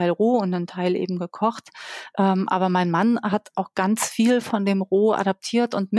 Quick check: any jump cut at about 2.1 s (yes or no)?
no